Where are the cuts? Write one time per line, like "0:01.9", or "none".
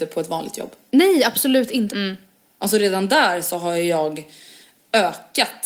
0:01.9